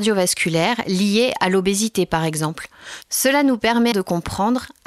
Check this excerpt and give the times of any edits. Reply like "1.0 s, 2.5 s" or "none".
3.9 s